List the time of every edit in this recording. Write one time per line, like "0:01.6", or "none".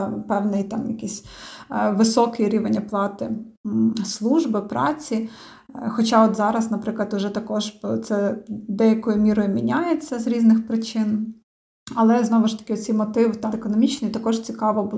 0:13.5